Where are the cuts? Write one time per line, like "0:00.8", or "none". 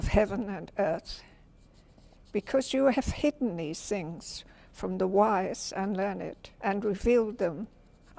0:06.5